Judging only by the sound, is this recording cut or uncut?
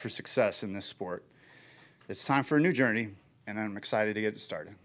uncut